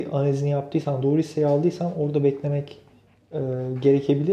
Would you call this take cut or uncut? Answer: uncut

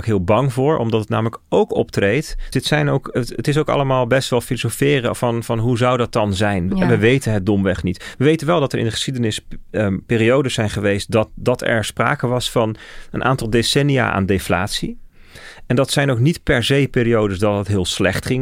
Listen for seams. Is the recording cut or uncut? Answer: cut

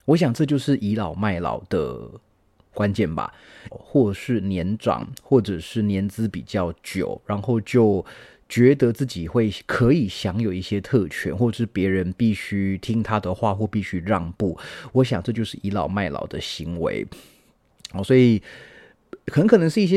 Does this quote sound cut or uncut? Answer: cut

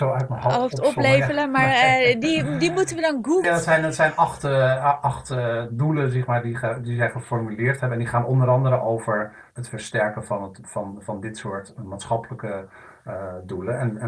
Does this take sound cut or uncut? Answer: cut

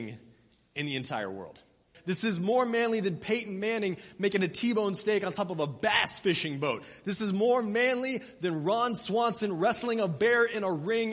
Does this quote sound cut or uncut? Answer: cut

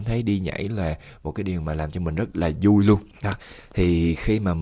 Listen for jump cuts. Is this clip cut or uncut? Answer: cut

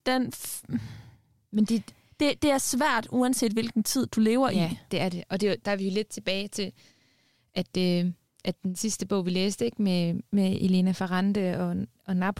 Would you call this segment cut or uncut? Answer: uncut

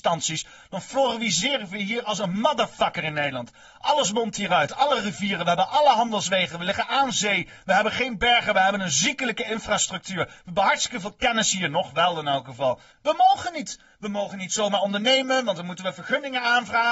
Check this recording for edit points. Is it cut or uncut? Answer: cut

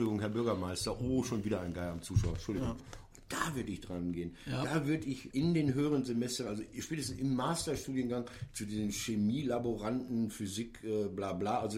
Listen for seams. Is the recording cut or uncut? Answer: cut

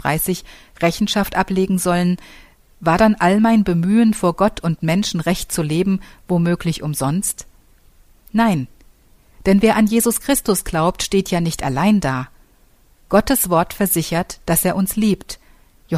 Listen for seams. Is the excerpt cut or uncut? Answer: uncut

